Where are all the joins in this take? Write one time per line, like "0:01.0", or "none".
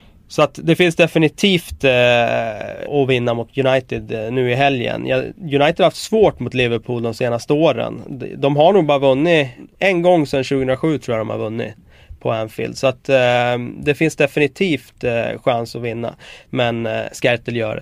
0:02.9
0:16.5